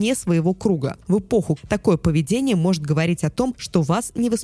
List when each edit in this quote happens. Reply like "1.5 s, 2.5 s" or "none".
1.6 s